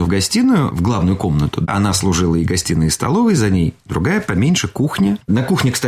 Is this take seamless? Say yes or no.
yes